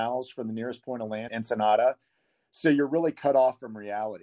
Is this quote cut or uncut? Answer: cut